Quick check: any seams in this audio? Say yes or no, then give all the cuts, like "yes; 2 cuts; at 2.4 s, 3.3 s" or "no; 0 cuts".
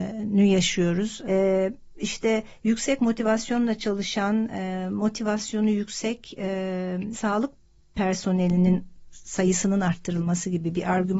yes; 2 cuts; at 1.2 s, 7.1 s